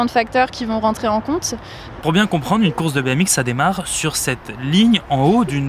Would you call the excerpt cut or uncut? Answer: cut